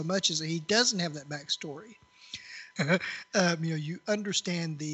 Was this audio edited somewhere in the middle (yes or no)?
yes